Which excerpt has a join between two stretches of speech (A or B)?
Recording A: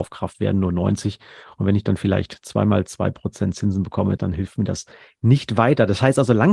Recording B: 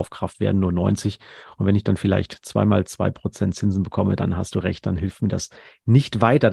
A